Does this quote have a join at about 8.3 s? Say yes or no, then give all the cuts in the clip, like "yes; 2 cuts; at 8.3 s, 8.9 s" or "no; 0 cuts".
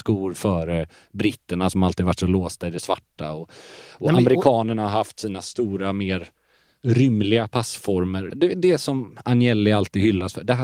yes; 1 cut; at 8.3 s